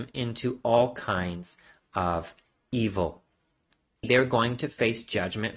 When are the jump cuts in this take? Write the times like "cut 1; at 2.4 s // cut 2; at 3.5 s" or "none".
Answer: cut 1; at 4.0 s